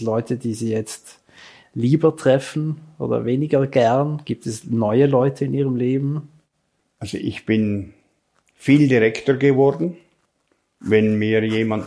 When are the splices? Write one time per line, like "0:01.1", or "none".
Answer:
none